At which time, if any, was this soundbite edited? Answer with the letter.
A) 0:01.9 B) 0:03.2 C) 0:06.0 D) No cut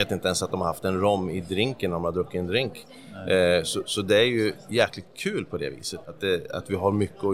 C